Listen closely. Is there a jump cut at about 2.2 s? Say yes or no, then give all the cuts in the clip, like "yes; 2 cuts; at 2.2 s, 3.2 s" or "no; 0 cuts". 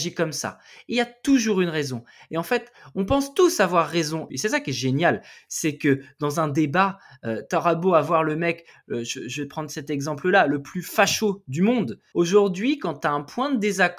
no; 2 cuts; at 4.3 s, 12.1 s